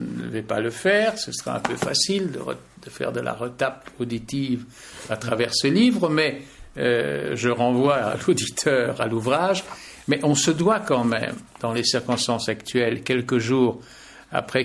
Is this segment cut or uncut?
uncut